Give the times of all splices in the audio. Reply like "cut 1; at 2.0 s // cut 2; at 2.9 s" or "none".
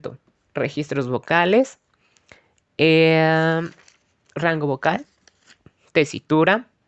none

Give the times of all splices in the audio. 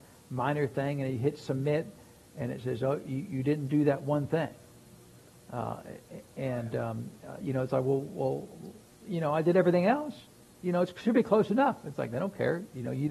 none

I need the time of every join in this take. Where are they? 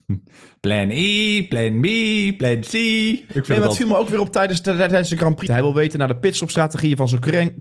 cut 1; at 5.5 s

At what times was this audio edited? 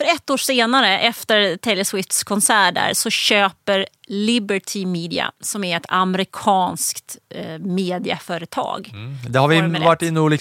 none

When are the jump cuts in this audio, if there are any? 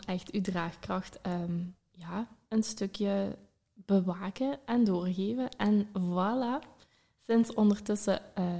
none

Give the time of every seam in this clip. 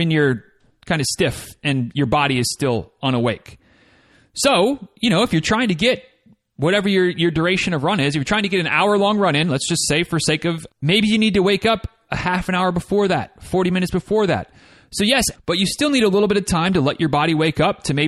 cut 1; at 10.7 s // cut 2; at 15.3 s

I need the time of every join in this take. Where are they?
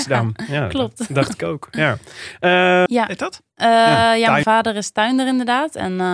cut 1; at 2.9 s // cut 2; at 4.4 s

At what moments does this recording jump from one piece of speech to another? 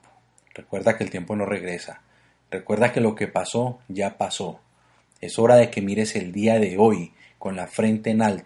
none

